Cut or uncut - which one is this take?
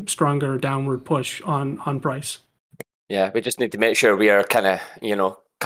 uncut